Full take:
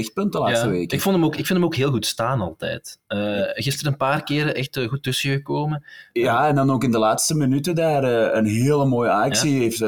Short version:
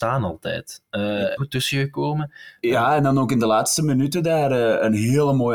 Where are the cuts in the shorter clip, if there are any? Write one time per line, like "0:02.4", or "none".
0:01.4